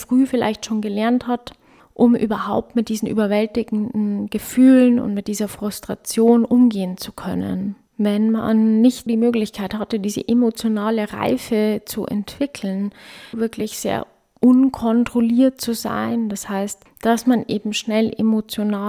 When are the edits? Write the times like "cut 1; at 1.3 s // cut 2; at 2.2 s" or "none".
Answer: cut 1; at 9.1 s // cut 2; at 13.3 s